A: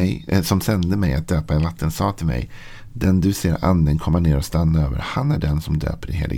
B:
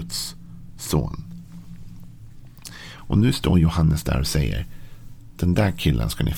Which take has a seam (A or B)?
B